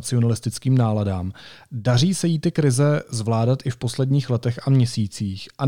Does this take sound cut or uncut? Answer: uncut